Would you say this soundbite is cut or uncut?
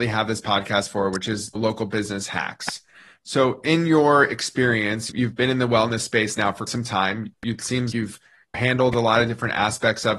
cut